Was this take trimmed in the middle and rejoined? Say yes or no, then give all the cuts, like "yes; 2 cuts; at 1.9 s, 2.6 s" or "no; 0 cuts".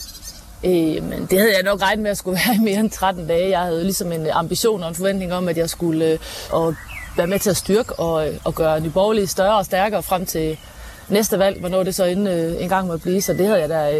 yes; 1 cut; at 6.5 s